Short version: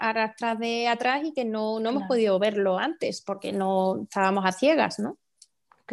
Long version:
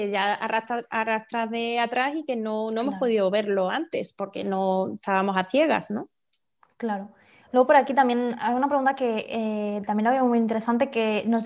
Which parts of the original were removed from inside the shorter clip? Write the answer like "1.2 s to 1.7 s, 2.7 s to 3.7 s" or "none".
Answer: none